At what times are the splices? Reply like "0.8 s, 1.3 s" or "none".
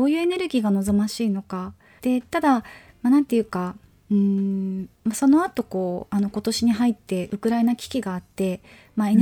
2.0 s